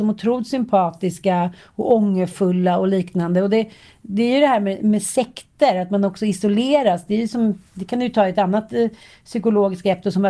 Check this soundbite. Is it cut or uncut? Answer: uncut